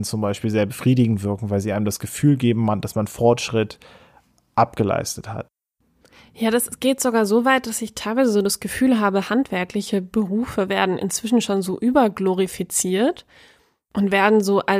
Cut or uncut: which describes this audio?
uncut